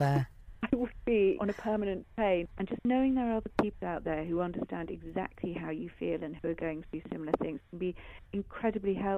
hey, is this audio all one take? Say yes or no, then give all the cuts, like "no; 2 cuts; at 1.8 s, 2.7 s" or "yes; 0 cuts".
no; 2 cuts; at 1.3 s, 2.5 s